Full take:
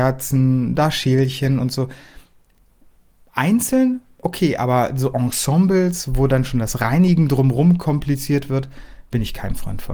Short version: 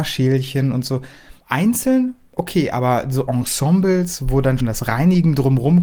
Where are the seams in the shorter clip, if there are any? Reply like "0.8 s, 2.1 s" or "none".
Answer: 1.4 s, 4.6 s